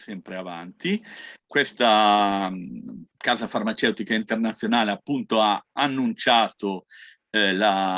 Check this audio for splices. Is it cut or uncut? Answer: uncut